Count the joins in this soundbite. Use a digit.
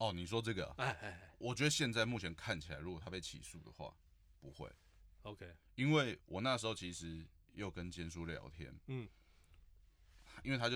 1